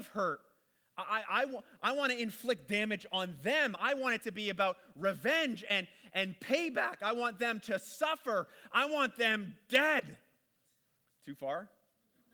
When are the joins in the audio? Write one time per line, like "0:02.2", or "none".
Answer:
none